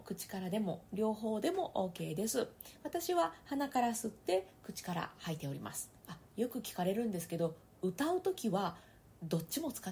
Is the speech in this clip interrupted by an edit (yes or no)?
yes